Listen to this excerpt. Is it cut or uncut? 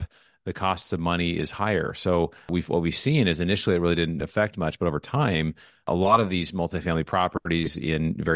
uncut